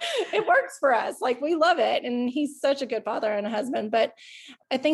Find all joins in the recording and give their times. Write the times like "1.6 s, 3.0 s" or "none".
none